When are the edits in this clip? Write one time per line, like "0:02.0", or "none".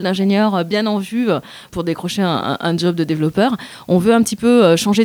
0:01.7